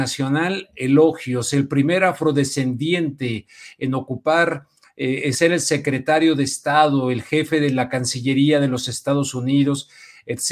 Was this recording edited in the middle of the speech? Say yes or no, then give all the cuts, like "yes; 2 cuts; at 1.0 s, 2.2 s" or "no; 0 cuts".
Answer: no; 0 cuts